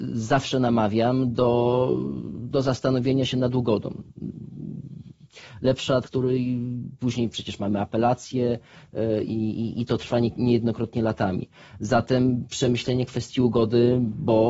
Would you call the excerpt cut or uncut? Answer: cut